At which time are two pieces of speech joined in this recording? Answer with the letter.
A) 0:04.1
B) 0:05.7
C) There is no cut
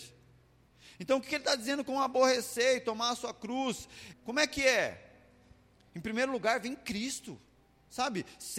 A